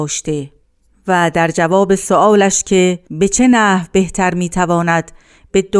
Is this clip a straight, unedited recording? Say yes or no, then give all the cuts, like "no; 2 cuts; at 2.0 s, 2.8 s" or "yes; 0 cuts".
no; 1 cut; at 3.0 s